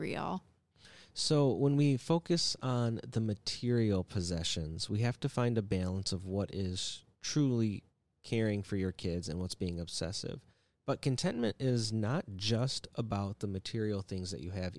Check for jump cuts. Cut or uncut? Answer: uncut